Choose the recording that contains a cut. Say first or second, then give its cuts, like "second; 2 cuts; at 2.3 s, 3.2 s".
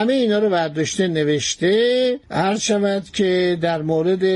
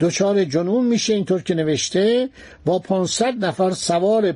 first; 1 cut; at 2.2 s